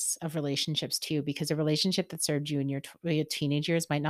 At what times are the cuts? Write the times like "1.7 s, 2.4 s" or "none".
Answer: none

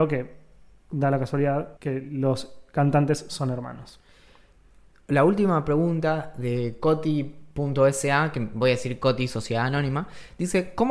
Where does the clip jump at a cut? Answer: 1.8 s

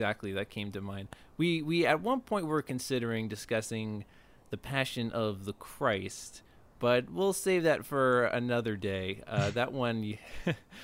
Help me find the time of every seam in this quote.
none

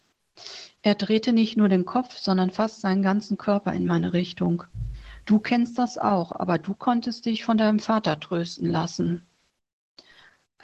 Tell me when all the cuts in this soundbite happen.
none

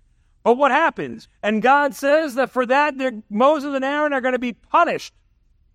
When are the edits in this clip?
1.2 s

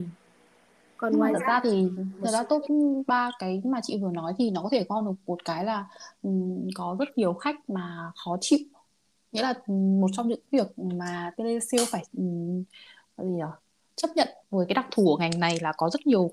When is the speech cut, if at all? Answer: 13.1 s, 14.4 s

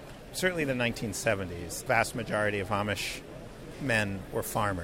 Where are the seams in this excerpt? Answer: 1.9 s

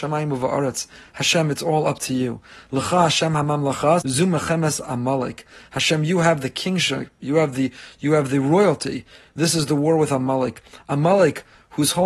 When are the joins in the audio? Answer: 4.0 s

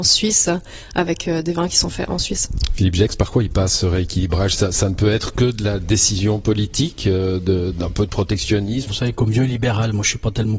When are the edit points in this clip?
7.7 s, 8.9 s

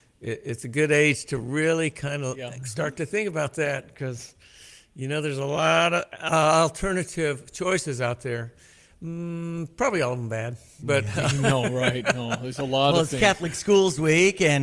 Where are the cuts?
none

